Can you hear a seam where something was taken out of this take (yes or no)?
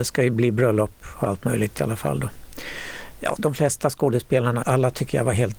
yes